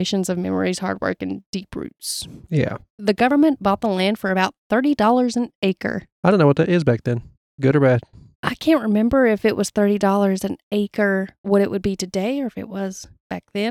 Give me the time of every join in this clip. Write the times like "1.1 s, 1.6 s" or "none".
none